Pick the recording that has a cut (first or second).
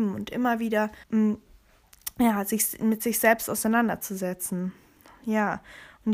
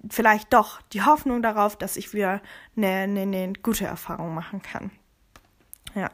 first